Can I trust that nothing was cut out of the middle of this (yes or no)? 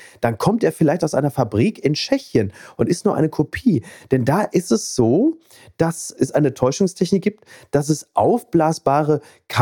yes